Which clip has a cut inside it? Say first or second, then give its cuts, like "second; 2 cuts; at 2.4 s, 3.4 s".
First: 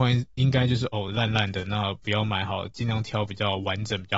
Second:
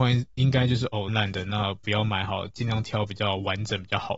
second; 1 cut; at 1.1 s